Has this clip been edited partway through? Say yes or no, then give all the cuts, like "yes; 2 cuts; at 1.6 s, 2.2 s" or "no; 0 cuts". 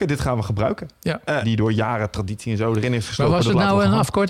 yes; 1 cut; at 1.4 s